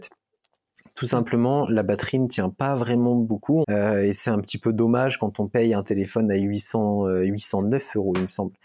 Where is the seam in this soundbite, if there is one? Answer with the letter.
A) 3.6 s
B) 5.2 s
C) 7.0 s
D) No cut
A